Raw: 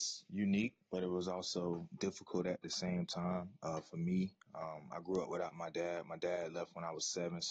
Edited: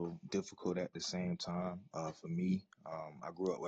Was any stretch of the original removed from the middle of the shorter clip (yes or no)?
no